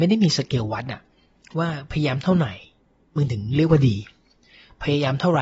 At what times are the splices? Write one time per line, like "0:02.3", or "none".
none